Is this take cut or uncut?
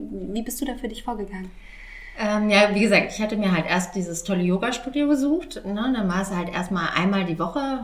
uncut